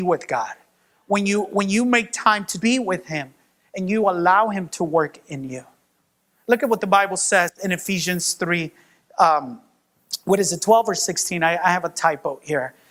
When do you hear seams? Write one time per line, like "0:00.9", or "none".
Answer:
0:02.6

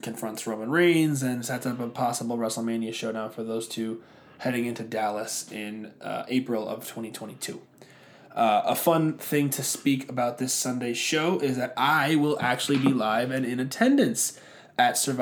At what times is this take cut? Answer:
none

